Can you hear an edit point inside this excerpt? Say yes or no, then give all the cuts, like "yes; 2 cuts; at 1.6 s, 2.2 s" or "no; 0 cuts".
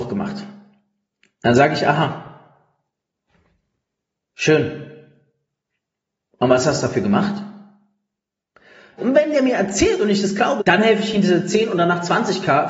yes; 2 cuts; at 9.0 s, 10.6 s